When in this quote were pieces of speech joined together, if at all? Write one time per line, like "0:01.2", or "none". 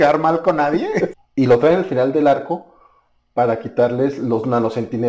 0:01.1